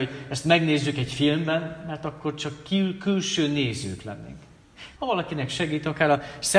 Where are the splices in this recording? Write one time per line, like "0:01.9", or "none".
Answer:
0:05.0